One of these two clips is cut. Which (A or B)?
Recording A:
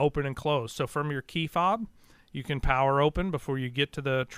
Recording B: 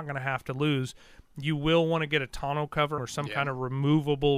B